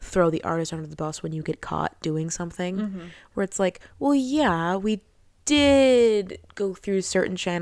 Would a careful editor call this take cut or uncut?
uncut